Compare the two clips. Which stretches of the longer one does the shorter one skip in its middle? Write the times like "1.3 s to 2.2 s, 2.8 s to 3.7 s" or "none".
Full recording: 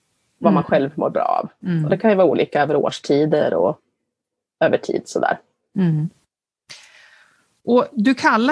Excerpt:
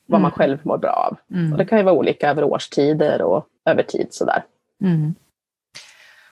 3.9 s to 4.5 s